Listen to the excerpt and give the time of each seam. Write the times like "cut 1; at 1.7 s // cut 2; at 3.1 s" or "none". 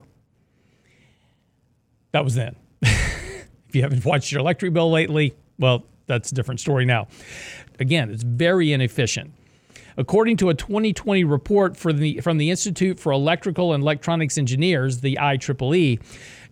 cut 1; at 7.7 s